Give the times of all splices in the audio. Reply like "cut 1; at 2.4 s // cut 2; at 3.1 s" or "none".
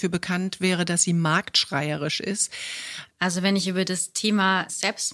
cut 1; at 3.1 s